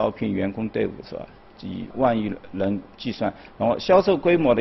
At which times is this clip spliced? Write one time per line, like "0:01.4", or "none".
0:01.9